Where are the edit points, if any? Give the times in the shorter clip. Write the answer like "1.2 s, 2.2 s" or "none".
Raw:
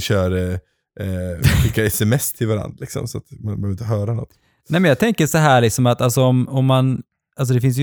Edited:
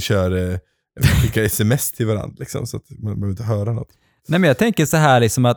1.0 s

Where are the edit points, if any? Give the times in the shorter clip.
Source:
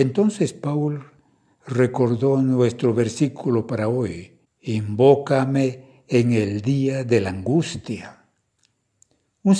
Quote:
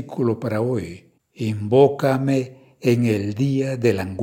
none

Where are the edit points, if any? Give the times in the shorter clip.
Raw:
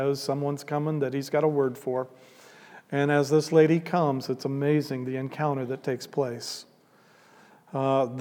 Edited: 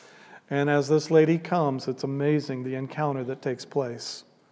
none

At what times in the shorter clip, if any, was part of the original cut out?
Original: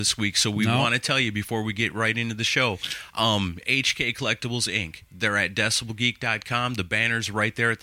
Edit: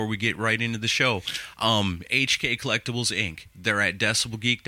none

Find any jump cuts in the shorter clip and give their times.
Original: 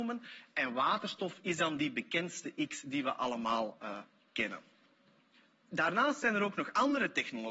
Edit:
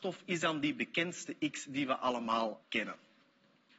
2.6 s

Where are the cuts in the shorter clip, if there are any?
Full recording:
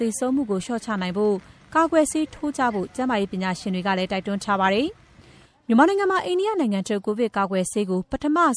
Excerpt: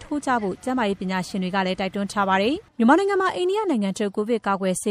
2.7 s

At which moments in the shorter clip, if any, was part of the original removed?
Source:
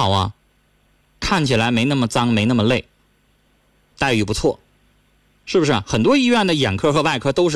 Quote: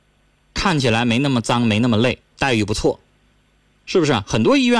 2.3 s

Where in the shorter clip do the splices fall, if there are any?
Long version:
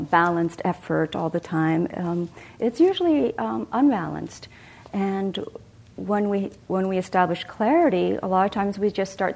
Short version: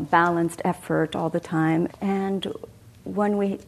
1.9 s

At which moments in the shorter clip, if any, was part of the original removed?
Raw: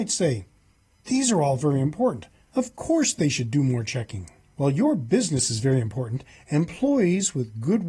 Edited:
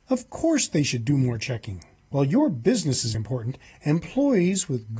3.1 s

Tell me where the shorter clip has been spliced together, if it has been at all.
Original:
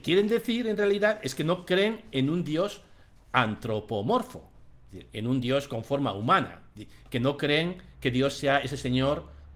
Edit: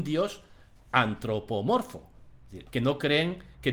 2.7 s

